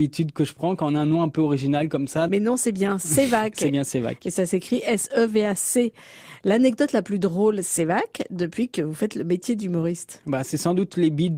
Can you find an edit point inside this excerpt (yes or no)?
yes